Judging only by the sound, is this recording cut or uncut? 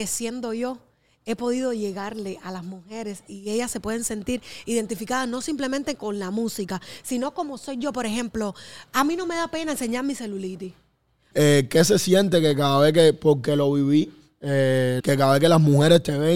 cut